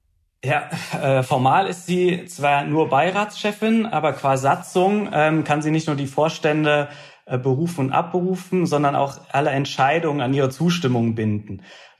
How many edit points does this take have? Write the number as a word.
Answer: zero